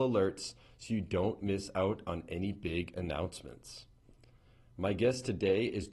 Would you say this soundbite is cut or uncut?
uncut